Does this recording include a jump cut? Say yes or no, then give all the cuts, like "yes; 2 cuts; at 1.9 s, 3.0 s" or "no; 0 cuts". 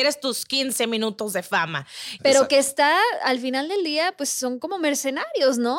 yes; 1 cut; at 2.2 s